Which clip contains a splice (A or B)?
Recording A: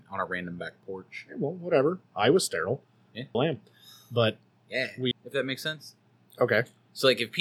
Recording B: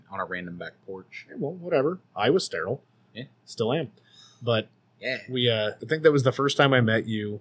A